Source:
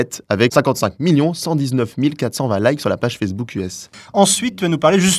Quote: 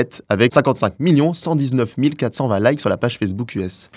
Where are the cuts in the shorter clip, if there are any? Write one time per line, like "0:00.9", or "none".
none

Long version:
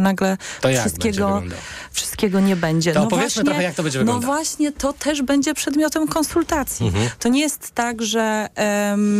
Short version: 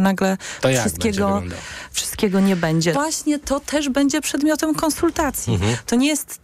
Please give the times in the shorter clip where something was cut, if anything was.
0:02.9

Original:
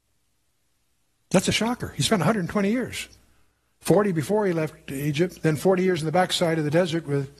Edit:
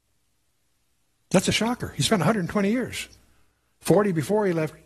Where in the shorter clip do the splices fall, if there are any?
none

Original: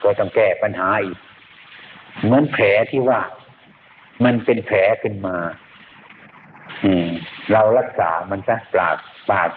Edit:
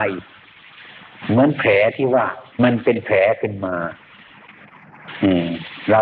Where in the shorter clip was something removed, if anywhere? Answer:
0:02.5

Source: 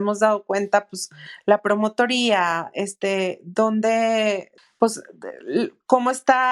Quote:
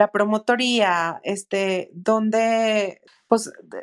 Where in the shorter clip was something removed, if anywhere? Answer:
none

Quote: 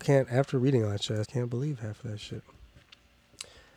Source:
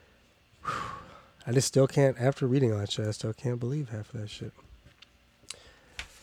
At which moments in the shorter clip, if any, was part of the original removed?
0:01.2

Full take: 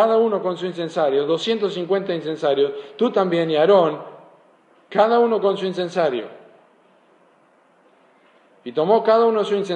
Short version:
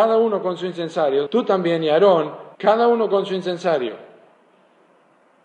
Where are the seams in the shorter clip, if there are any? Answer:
0:01.3
0:02.5

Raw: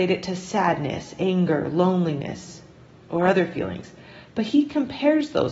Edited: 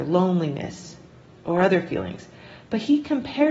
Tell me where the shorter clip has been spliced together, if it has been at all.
none

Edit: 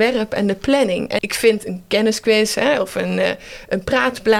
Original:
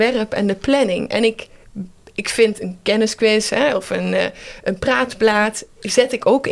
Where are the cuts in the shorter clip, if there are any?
0:01.2

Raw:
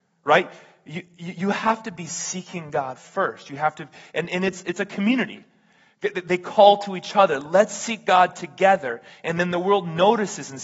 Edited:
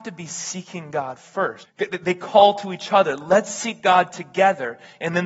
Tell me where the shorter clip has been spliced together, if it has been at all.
0:01.6

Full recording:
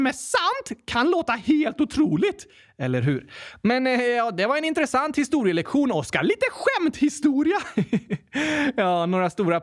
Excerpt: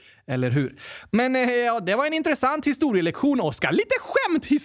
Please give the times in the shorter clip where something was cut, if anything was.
none

